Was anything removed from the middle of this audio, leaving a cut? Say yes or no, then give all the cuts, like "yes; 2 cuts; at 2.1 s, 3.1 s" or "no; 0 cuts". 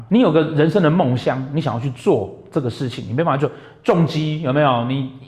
no; 0 cuts